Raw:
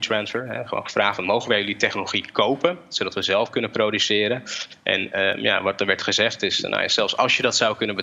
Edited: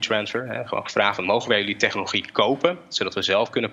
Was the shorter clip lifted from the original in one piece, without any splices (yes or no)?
yes